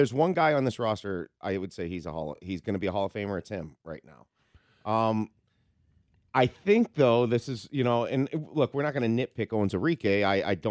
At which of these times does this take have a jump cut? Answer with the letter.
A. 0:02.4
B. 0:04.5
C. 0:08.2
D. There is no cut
D